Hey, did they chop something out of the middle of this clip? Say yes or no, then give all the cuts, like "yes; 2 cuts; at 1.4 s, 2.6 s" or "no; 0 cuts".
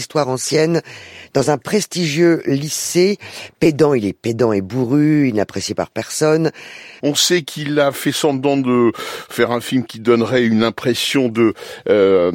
yes; 1 cut; at 7.0 s